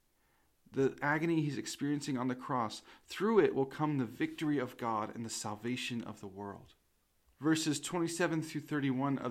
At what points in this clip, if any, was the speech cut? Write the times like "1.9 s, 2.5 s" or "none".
7.3 s